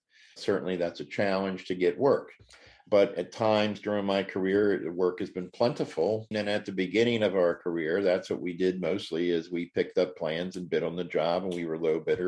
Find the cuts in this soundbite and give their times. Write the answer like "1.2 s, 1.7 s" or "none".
6.3 s